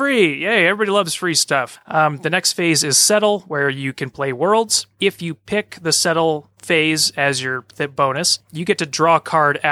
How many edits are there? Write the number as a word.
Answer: zero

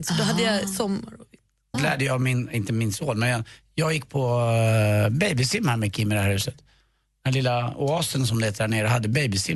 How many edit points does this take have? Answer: one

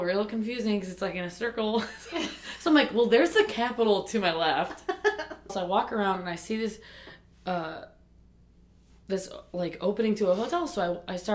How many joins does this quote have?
one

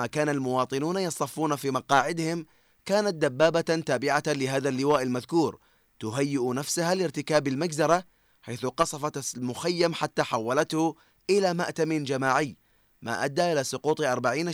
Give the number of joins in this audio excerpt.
zero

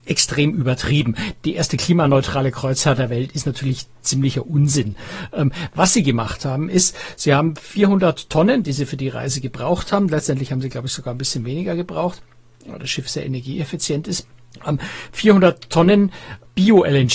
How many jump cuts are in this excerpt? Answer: one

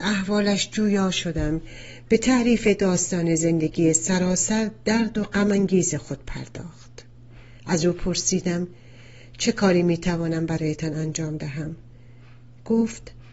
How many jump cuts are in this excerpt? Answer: one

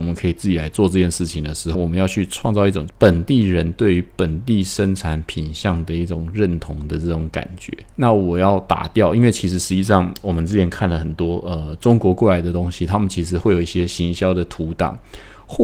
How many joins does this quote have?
two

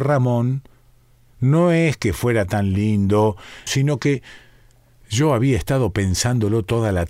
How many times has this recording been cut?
one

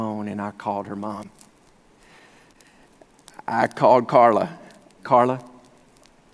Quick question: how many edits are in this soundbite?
one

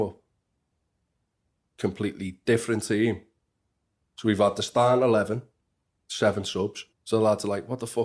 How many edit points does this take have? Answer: two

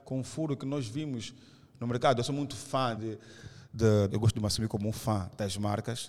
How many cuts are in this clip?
two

